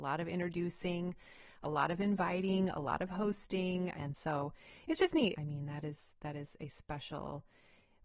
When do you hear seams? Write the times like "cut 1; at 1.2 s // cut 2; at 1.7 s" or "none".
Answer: cut 1; at 3.9 s // cut 2; at 5.3 s